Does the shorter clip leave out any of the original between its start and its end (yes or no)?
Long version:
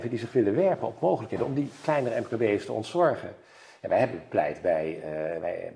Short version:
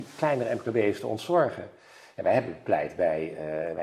no